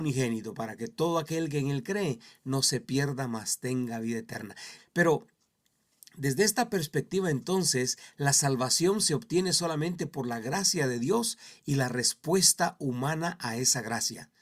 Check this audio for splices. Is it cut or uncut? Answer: cut